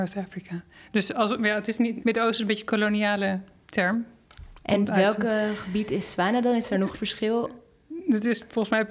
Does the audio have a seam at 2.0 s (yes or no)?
yes